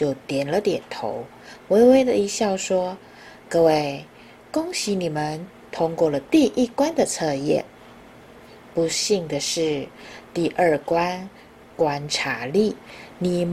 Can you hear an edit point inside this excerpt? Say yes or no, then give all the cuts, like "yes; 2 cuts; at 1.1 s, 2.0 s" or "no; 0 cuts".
no; 0 cuts